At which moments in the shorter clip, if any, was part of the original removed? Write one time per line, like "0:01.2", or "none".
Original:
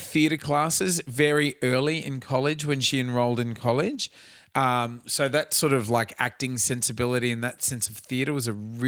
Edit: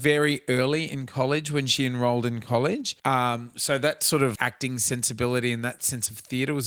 0:03.0
0:04.4